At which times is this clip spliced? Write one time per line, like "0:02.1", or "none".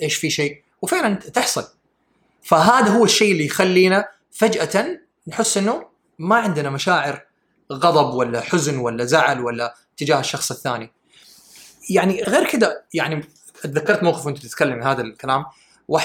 0:12.2

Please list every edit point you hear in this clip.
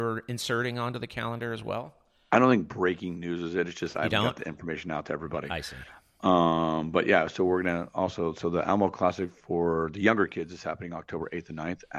none

